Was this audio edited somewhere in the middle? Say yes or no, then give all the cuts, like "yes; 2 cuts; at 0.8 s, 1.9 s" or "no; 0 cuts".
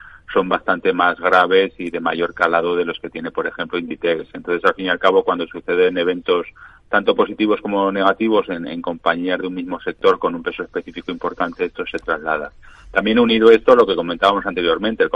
no; 0 cuts